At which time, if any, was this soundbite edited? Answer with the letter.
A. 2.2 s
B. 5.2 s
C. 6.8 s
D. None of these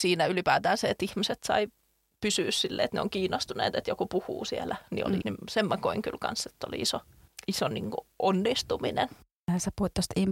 B